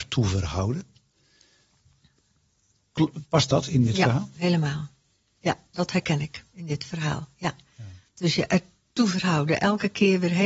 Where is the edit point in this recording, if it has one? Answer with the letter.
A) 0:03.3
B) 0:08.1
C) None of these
C